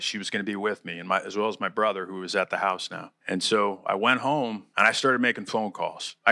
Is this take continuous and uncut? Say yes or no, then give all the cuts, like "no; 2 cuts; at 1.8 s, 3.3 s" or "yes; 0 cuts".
yes; 0 cuts